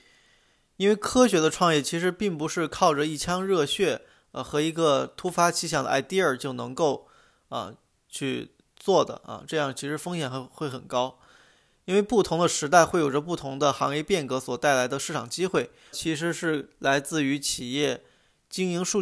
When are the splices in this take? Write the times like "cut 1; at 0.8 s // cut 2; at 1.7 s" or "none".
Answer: cut 1; at 15.9 s